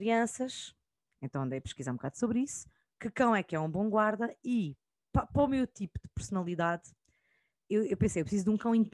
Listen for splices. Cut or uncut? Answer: uncut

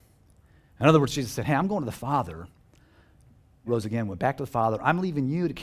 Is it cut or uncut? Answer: cut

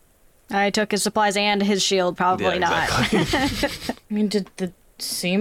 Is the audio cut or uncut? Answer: cut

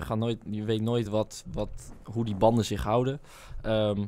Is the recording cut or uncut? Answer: uncut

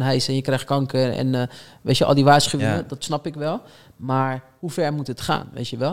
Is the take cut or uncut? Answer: uncut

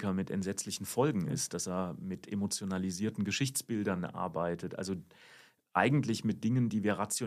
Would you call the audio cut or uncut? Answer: uncut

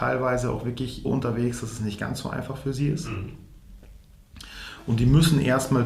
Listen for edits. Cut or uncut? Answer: cut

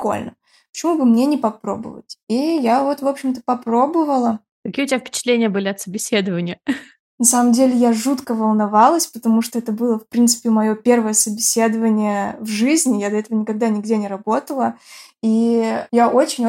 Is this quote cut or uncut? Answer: uncut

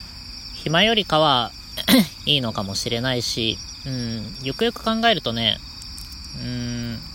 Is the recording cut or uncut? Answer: uncut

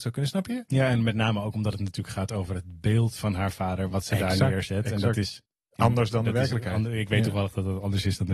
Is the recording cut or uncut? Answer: uncut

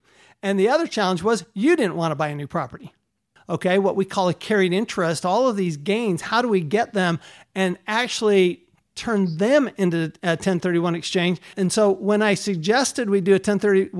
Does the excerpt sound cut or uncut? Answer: cut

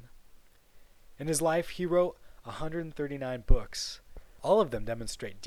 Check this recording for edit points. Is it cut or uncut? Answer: uncut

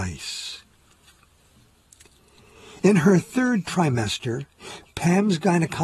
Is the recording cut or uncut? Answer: uncut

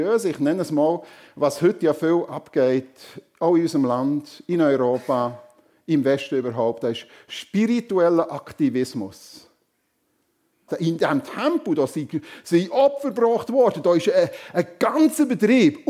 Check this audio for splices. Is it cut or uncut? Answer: cut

